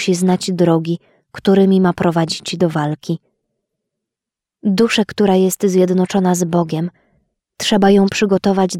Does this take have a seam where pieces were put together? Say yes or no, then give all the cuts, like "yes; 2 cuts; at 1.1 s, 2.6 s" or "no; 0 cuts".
no; 0 cuts